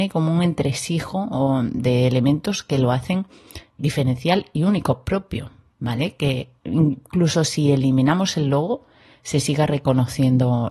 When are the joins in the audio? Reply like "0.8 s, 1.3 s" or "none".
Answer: 3.8 s